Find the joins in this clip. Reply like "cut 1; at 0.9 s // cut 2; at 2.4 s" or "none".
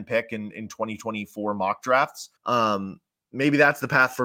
cut 1; at 2.4 s